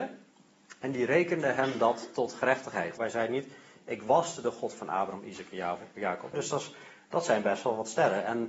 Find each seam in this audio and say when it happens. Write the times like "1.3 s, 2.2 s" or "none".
3.0 s, 6.3 s